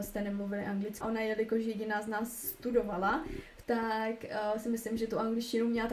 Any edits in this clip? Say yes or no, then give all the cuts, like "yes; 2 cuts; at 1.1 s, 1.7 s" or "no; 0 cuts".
yes; 2 cuts; at 1.0 s, 3.6 s